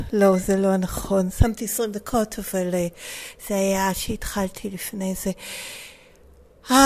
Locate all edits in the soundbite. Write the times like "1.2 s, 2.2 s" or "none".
none